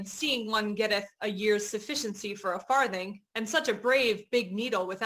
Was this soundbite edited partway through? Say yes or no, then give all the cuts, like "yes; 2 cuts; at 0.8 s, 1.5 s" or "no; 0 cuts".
no; 0 cuts